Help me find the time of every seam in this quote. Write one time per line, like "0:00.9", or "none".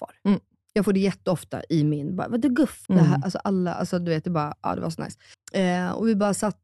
0:02.9
0:05.3

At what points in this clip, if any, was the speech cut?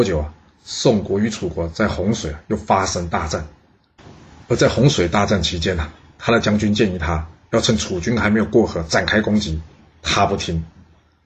none

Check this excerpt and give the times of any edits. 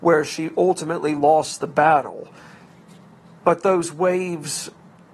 0:03.3

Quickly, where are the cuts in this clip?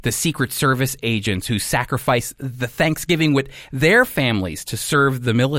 none

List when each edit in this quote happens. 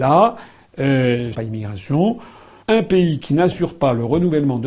0:01.3
0:02.6

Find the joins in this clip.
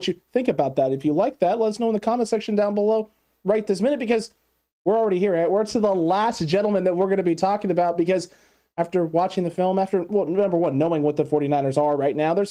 none

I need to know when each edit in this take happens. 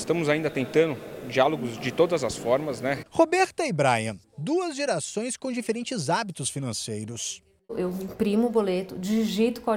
0:01.8
0:03.0
0:04.2

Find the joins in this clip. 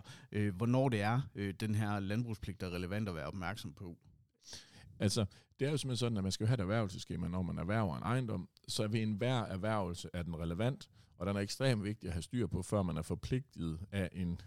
none

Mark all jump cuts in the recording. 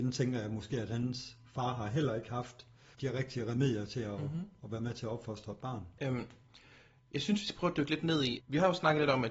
0:02.9
0:06.0
0:08.4

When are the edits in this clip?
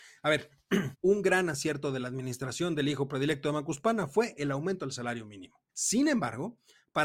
0:00.9
0:05.7

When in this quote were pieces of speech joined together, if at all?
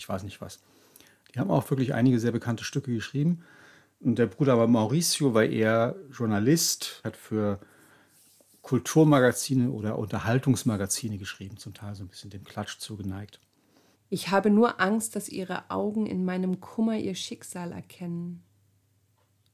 0:07.0
0:13.9

